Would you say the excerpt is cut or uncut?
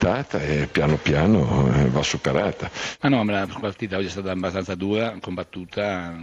cut